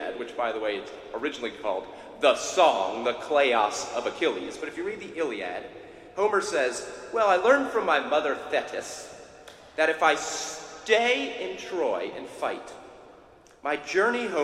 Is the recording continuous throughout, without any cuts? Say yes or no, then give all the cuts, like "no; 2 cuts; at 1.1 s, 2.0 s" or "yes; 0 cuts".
yes; 0 cuts